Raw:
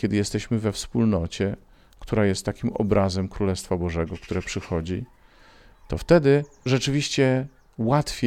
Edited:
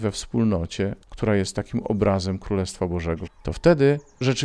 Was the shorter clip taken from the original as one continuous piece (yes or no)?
no